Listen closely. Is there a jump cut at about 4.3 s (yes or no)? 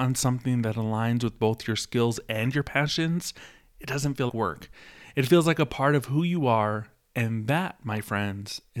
yes